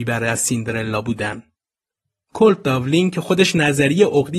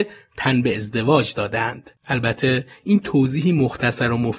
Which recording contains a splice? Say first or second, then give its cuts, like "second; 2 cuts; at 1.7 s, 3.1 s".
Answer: second; 1 cut; at 2.0 s